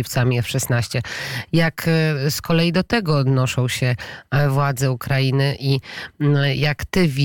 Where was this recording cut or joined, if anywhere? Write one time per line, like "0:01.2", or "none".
none